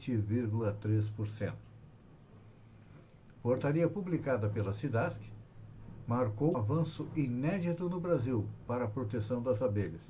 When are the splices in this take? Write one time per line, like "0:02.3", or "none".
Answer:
0:03.3
0:06.5